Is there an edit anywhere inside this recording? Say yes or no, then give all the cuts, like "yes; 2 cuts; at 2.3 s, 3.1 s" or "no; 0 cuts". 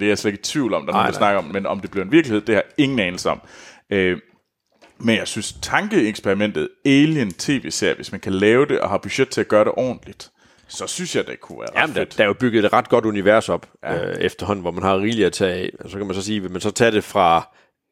no; 0 cuts